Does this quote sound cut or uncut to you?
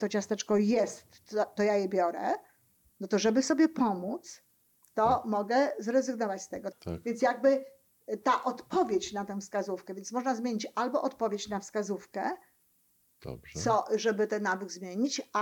cut